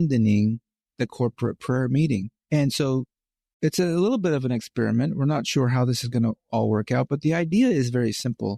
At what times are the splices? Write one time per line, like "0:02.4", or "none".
0:02.4